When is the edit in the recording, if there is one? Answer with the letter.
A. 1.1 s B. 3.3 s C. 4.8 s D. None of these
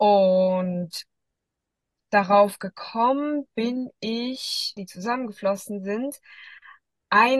C